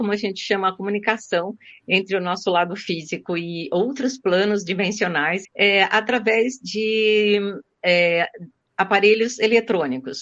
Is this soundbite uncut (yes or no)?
no